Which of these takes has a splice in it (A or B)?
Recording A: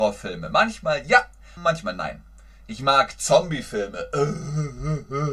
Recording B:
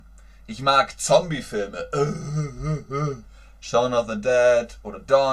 A